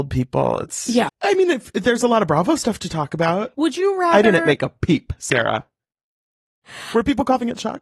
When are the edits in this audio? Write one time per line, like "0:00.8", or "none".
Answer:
0:01.1
0:03.5